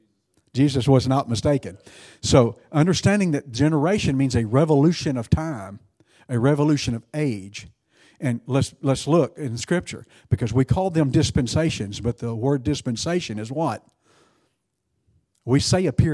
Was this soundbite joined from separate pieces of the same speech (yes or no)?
no